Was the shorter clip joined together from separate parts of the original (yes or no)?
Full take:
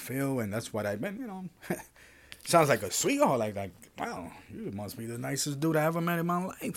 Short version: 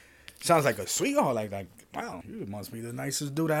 yes